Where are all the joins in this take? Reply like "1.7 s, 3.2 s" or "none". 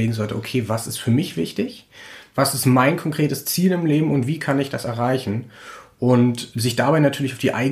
none